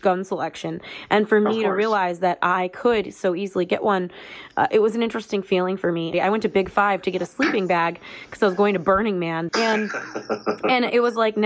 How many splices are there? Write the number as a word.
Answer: two